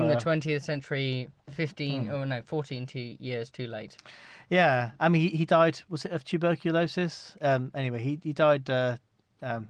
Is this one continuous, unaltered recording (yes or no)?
yes